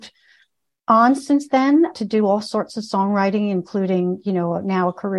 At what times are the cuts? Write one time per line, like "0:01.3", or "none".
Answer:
none